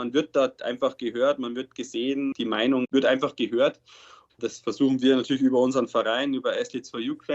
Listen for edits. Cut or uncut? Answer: cut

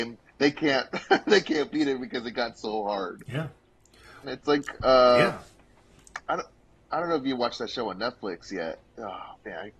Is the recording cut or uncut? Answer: cut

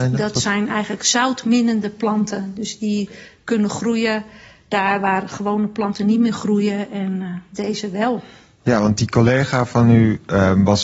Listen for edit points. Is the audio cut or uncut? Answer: uncut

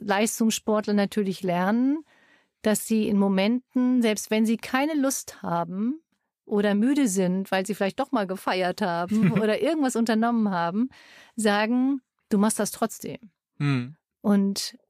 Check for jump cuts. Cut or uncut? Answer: uncut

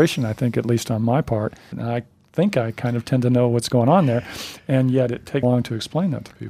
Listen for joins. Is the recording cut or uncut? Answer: cut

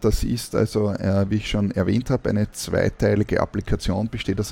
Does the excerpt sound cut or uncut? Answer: uncut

